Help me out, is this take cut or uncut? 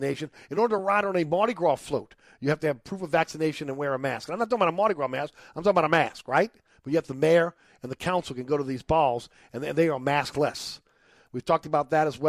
uncut